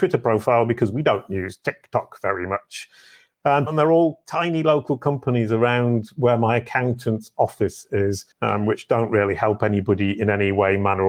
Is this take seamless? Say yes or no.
no